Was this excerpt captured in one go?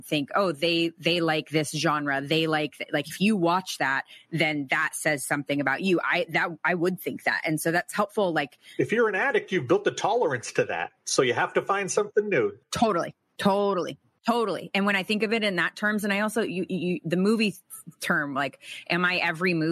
yes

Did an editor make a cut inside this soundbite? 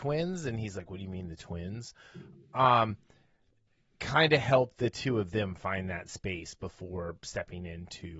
no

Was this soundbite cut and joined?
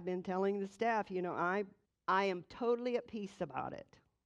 yes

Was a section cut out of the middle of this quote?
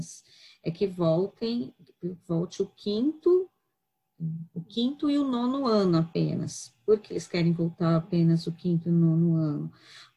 yes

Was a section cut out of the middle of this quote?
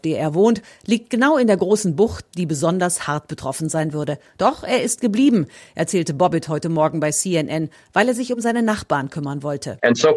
no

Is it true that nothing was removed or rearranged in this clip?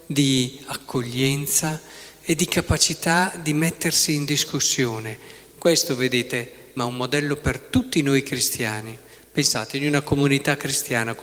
no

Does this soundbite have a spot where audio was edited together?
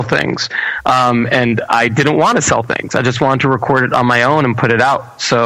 no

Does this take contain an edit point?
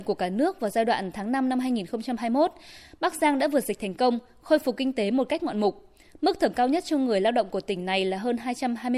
no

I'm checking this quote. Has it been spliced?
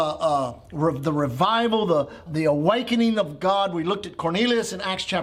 yes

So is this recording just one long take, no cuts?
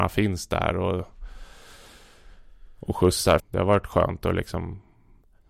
no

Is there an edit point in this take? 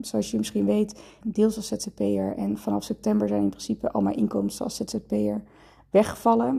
yes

